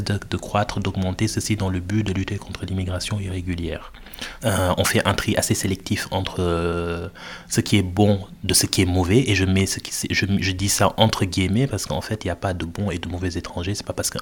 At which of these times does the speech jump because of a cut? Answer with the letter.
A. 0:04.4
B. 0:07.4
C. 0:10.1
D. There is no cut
A